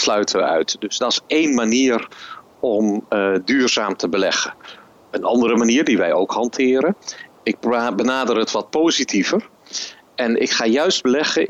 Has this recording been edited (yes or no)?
yes